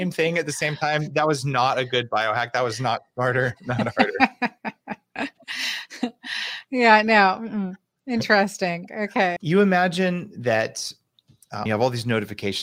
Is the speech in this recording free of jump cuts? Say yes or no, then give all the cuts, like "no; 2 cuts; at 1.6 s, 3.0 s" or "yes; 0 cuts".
no; 2 cuts; at 9.4 s, 11.7 s